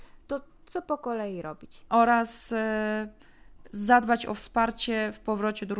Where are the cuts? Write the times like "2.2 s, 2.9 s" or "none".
1.9 s